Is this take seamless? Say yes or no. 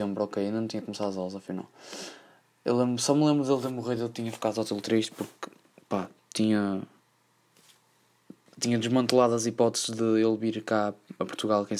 yes